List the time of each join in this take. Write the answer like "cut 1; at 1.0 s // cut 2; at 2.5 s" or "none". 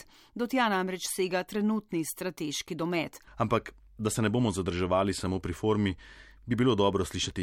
cut 1; at 3.3 s